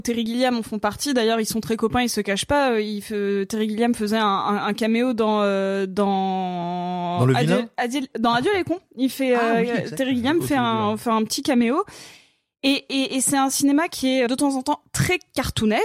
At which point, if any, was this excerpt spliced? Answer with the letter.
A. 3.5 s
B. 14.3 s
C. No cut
B